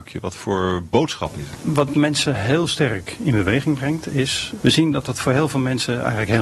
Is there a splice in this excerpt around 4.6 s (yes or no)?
yes